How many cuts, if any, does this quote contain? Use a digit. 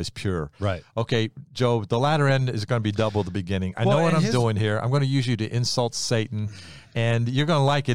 0